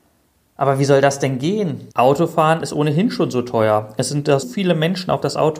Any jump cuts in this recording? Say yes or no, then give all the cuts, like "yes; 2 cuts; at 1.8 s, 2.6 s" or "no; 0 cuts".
yes; 2 cuts; at 1.9 s, 4.4 s